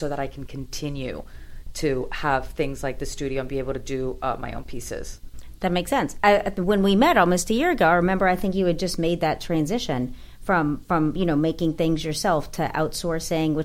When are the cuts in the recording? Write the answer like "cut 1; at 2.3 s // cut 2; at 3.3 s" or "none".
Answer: none